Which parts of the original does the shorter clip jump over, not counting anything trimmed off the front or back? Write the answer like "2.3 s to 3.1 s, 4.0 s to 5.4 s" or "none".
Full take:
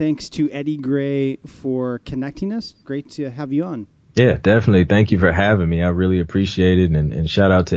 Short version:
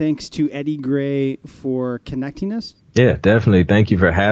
2.8 s to 4.0 s